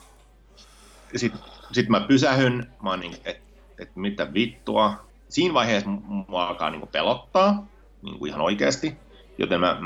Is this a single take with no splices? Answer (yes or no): no